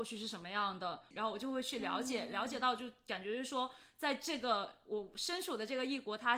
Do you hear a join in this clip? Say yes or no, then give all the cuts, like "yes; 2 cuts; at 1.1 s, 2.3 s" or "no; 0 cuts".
yes; 1 cut; at 1.1 s